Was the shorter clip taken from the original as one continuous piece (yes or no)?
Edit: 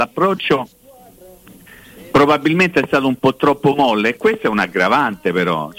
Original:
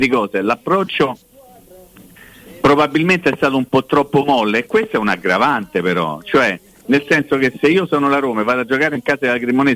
yes